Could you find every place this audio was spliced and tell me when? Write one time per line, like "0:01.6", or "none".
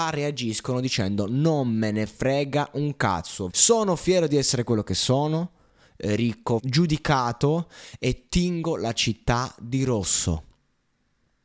0:03.5
0:06.6